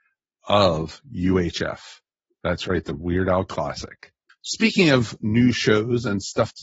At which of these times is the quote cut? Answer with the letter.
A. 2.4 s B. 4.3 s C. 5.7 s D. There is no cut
B